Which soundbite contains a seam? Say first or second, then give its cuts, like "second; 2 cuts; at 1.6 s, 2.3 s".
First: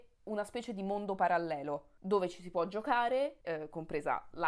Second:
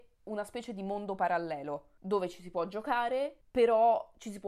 first; 1 cut; at 3.4 s